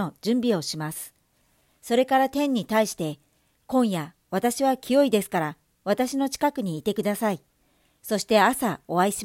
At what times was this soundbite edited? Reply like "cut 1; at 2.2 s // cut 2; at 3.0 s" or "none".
none